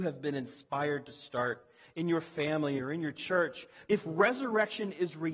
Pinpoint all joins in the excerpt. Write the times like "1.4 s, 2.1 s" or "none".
2.8 s, 3.9 s

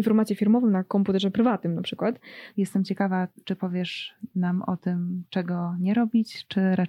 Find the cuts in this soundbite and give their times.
2.5 s

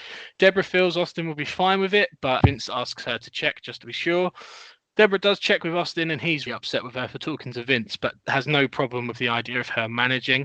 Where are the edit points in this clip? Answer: 2.4 s, 6.5 s

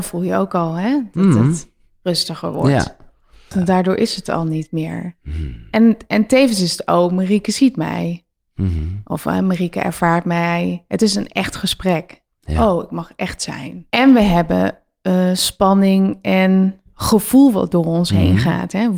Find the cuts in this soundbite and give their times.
3.5 s, 13.9 s

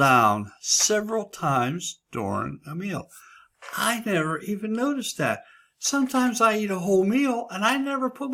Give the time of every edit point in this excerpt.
none

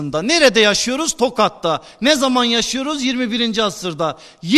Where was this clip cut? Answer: none

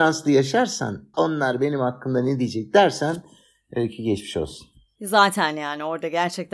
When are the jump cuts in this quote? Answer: 1.1 s

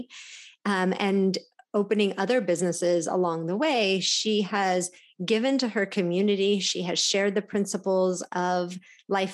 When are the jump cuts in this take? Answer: none

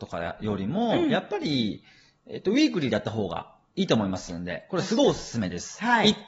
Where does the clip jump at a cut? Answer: none

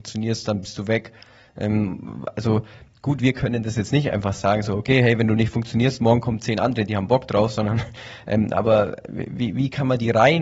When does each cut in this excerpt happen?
none

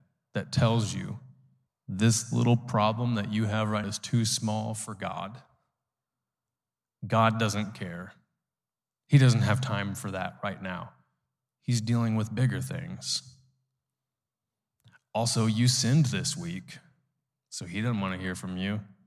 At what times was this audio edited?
3.8 s

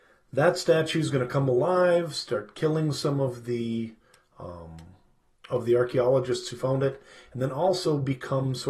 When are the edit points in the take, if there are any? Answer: none

